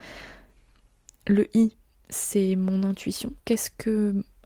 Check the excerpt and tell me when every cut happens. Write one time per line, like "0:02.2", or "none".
0:03.4